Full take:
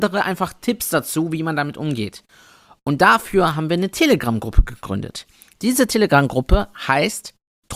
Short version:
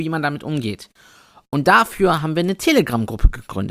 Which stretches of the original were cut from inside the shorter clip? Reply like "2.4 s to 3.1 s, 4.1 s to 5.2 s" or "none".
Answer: none